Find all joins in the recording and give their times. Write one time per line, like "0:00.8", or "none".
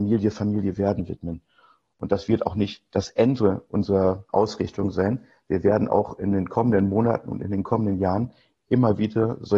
0:01.9